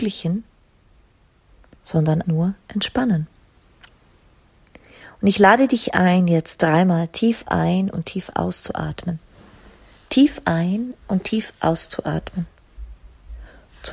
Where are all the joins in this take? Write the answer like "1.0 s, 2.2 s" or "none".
2.2 s